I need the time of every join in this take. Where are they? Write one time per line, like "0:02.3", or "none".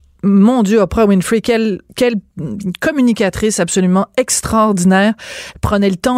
0:01.9